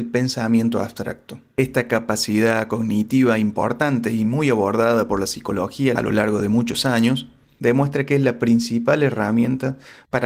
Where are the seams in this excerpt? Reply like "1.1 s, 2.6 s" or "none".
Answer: none